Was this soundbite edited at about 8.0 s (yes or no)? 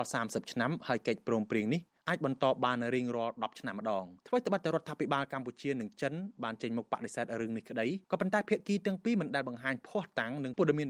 yes